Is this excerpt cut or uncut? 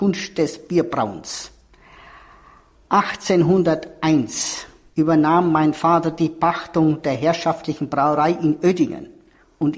uncut